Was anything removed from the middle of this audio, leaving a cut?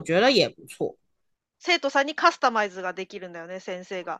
yes; 1 cut; at 1.5 s

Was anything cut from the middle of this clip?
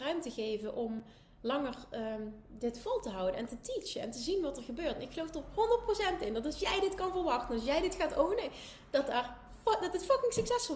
no; 0 cuts

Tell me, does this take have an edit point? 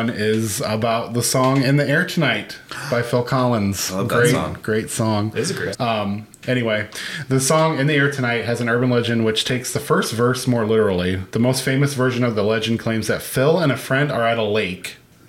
yes; 1 cut; at 5.7 s

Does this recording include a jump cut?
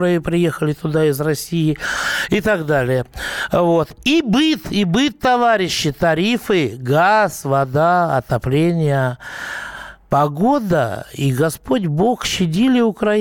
no; 0 cuts

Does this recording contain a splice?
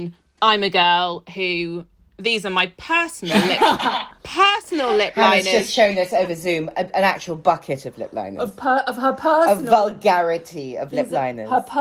no; 0 cuts

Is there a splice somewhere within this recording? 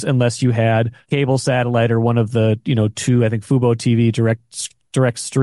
yes; 1 cut; at 1.0 s

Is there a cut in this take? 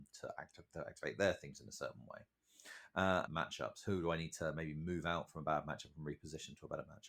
yes; 1 cut; at 3.3 s

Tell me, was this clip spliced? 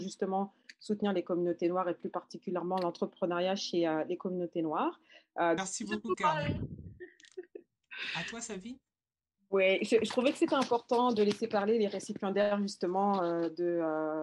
yes; 1 cut; at 5.6 s

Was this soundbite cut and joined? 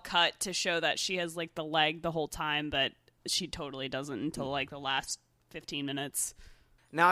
no; 0 cuts

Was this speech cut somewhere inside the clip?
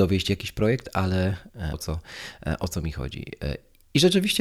yes; 1 cut; at 1.7 s

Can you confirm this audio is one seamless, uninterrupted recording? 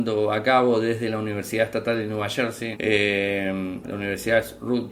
no; 2 cuts; at 2.7 s, 3.8 s

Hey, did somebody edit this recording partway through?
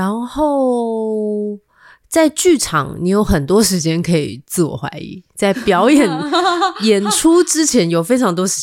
no; 0 cuts

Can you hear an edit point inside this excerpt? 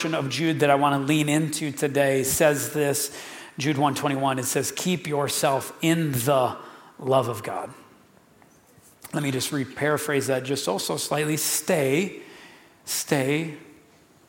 no; 0 cuts

